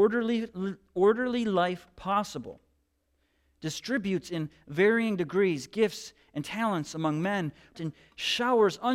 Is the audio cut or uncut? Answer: cut